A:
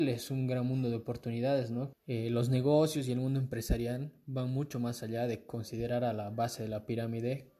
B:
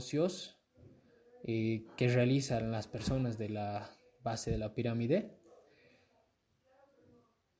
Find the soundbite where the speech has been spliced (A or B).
A